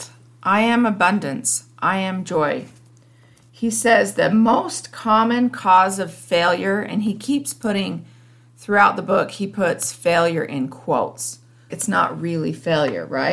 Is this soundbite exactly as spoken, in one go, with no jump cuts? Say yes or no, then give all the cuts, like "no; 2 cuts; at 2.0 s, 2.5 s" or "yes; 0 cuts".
no; 1 cut; at 11.7 s